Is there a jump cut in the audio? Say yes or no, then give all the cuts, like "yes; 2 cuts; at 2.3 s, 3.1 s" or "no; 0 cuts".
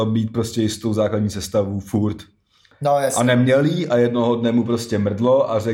no; 0 cuts